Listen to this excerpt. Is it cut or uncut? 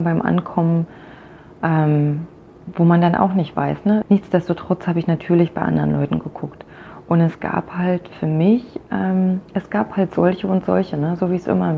cut